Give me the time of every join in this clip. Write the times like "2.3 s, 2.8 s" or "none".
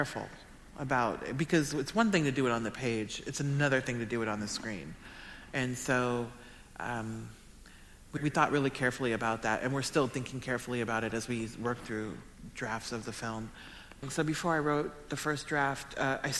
8.2 s, 14.0 s